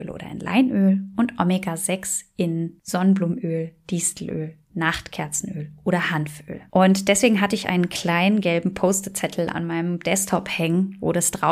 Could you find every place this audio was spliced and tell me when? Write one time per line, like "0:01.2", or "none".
0:06.7